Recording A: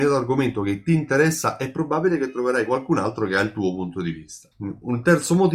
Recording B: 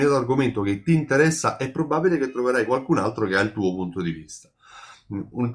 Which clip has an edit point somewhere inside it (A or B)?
A